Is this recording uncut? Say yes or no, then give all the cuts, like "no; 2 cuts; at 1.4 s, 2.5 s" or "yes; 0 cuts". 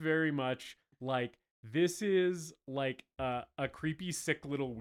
yes; 0 cuts